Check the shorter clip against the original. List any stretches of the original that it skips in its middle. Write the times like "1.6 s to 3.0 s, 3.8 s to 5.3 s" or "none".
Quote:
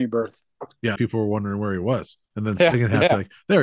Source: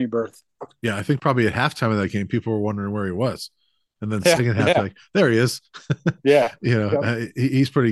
1.0 s to 2.3 s, 3.6 s to 3.9 s